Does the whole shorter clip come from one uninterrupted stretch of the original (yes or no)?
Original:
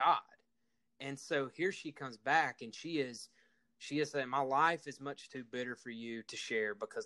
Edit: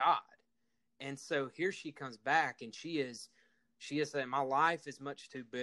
yes